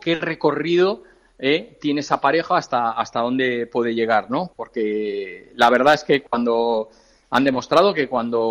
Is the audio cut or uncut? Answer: uncut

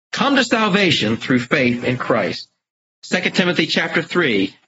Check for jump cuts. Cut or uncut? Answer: cut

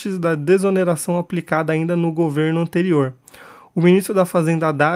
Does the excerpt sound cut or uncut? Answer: uncut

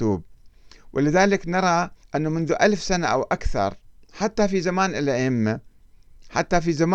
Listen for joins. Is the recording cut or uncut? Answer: cut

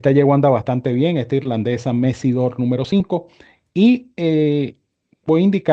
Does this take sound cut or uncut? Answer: uncut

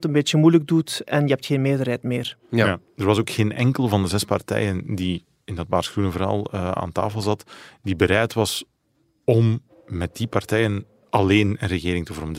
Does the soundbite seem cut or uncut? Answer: uncut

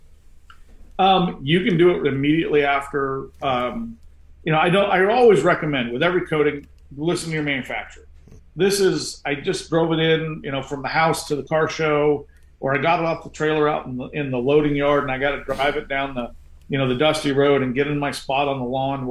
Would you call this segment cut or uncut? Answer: cut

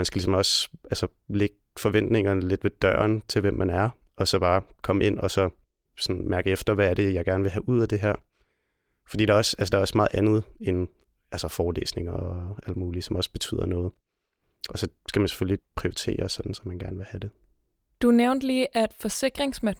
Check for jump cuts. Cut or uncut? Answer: uncut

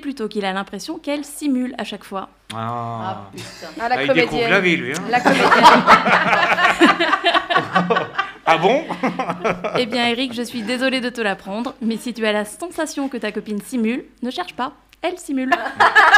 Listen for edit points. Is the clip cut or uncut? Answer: uncut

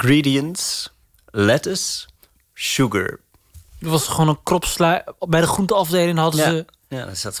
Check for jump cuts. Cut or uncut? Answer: cut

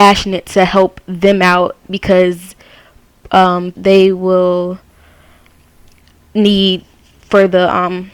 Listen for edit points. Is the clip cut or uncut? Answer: cut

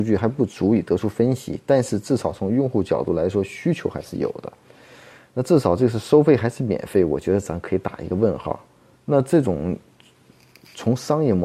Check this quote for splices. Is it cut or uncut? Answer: cut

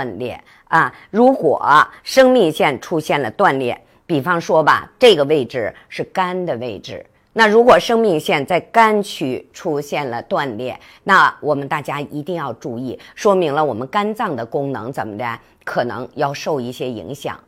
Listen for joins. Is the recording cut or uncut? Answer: uncut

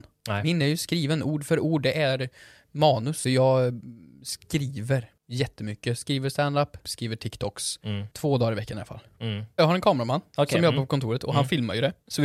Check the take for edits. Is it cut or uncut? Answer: cut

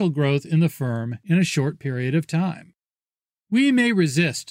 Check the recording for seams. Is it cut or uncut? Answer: uncut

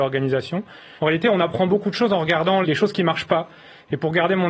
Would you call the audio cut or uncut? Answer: cut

